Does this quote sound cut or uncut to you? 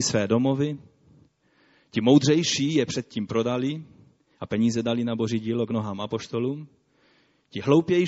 uncut